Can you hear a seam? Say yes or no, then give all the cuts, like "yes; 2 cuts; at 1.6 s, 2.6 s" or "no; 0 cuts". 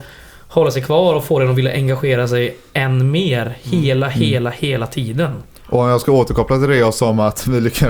no; 0 cuts